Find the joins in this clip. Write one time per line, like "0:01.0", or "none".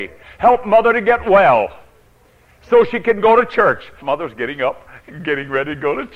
0:04.0